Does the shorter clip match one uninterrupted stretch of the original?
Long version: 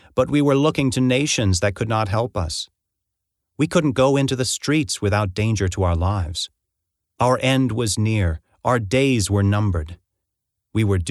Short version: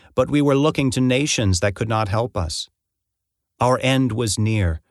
no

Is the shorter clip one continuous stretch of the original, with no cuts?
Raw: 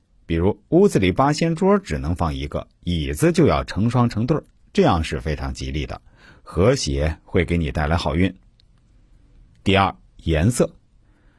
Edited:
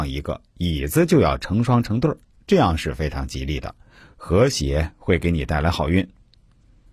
yes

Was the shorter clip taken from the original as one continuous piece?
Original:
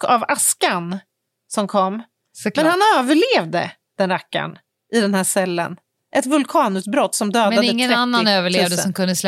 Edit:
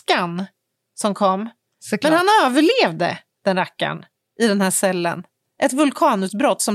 yes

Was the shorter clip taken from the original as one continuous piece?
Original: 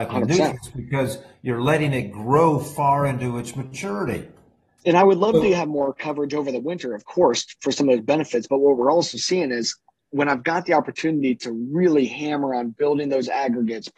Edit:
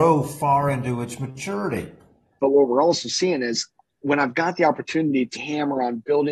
no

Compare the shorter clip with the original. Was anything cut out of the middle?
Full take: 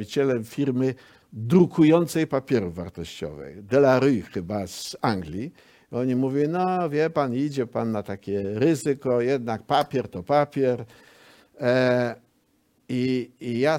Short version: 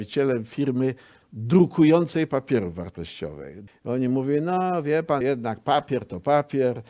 yes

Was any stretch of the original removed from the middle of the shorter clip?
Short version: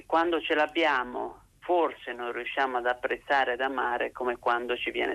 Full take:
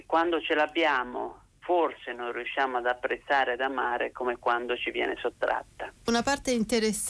no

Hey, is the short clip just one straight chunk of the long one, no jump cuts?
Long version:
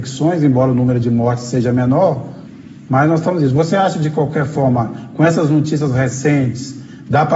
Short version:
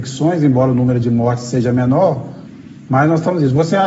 yes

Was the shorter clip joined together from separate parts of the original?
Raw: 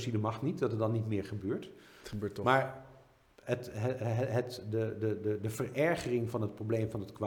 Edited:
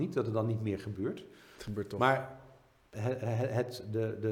yes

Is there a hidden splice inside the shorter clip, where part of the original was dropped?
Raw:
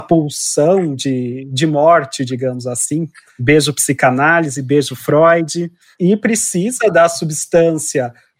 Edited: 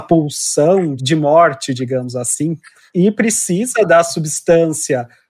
yes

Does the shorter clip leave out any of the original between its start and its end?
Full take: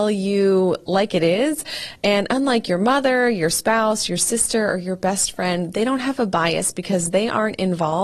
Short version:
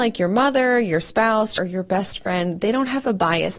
yes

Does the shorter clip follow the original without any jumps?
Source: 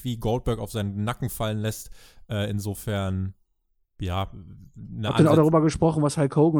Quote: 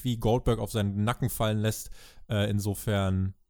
yes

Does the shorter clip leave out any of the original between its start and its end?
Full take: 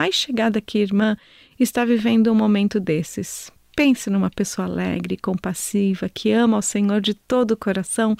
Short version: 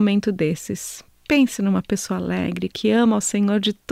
yes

